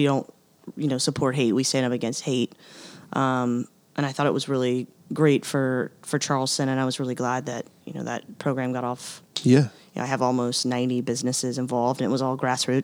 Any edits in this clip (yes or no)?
no